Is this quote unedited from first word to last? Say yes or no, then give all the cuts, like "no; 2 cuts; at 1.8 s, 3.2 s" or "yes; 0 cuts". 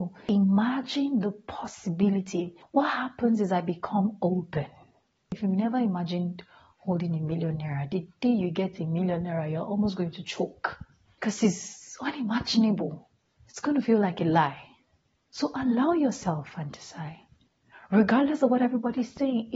yes; 0 cuts